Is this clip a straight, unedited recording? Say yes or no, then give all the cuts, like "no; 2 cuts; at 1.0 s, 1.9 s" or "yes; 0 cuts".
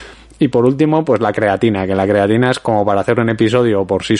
yes; 0 cuts